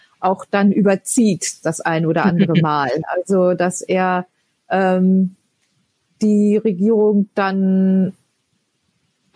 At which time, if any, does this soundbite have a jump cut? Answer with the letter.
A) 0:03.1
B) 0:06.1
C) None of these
C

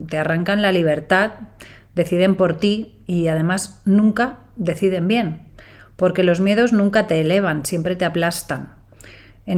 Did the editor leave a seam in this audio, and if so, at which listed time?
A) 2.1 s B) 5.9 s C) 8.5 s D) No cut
D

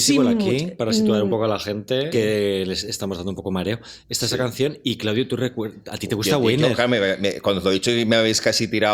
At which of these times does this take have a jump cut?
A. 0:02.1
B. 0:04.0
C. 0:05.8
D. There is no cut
A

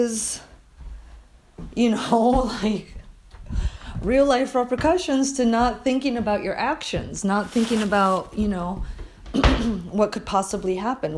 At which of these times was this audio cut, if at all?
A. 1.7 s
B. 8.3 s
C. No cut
C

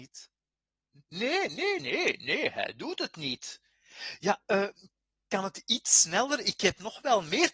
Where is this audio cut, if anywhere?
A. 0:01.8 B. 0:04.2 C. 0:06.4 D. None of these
A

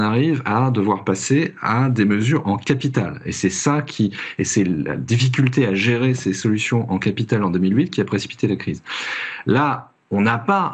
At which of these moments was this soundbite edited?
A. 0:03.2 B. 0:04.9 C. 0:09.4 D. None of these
D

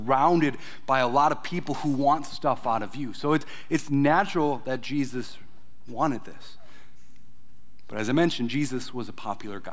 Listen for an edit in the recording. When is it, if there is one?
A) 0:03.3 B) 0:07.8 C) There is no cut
C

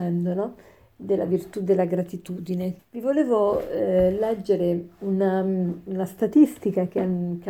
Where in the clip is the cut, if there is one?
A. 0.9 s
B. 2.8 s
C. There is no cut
B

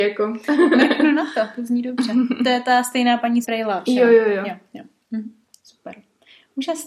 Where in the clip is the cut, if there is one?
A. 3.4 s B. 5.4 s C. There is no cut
A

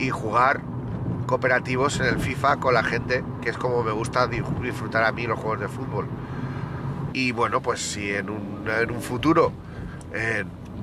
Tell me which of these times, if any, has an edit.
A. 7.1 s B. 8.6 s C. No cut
A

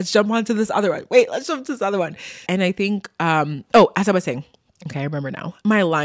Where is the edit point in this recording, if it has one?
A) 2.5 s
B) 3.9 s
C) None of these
A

